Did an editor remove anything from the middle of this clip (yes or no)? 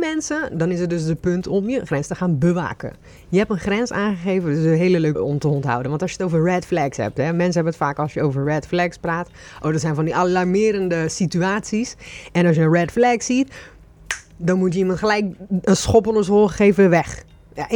yes